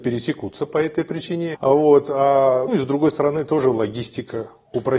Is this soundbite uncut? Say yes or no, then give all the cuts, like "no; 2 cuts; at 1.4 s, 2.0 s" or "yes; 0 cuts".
no; 2 cuts; at 1.5 s, 2.7 s